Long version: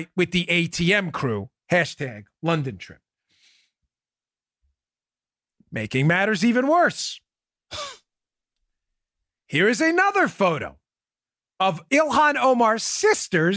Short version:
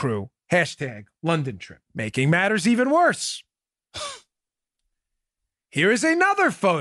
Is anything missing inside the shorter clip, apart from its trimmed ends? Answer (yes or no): yes